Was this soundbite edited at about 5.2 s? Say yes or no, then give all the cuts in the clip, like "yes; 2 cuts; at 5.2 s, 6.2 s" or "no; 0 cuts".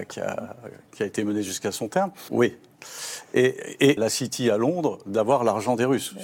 no; 2 cuts; at 2.3 s, 4.0 s